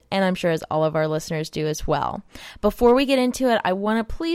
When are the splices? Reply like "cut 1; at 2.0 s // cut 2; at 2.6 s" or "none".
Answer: none